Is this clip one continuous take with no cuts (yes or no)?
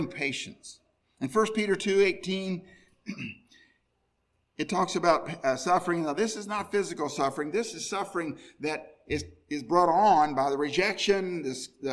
yes